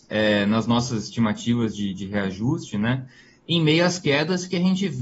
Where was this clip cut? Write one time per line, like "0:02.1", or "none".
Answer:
none